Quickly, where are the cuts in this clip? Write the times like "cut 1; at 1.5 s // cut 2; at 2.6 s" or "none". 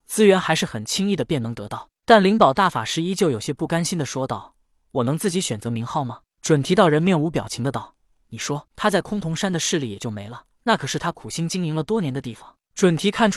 cut 1; at 8.7 s // cut 2; at 10.5 s